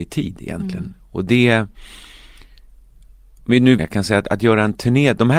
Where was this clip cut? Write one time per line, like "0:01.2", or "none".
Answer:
0:03.8